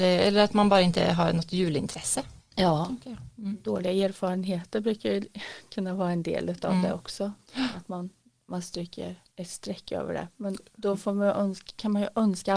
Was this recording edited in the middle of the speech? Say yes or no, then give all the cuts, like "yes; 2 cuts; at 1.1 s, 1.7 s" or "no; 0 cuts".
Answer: no; 0 cuts